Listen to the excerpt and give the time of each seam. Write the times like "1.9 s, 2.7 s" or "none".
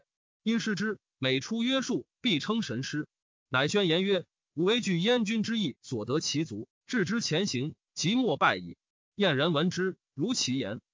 7.9 s